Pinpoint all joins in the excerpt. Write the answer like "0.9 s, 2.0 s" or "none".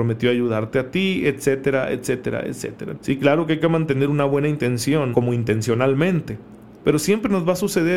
2.9 s, 5.1 s